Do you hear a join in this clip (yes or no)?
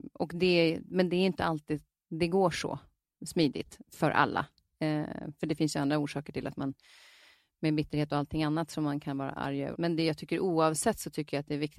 yes